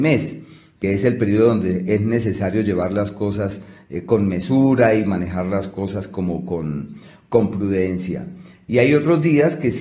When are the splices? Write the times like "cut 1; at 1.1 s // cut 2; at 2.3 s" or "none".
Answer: none